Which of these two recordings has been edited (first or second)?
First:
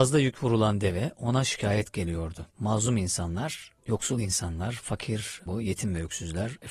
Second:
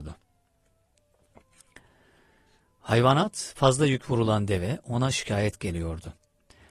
first